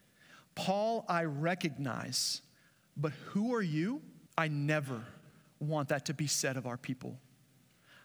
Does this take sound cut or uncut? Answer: cut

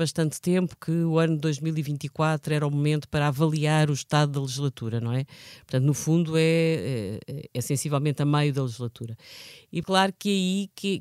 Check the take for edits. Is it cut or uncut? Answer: cut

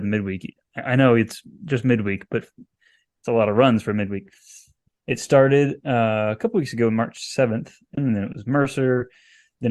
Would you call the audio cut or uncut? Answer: cut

